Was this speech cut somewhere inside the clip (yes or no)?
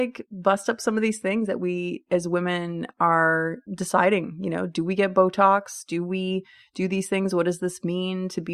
yes